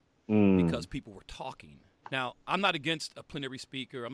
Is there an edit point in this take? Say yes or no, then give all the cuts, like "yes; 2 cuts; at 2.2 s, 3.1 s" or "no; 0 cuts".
yes; 1 cut; at 2.0 s